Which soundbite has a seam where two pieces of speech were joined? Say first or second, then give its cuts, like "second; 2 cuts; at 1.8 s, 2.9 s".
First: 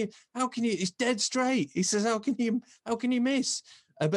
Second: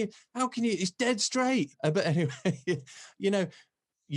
second; 1 cut; at 1.7 s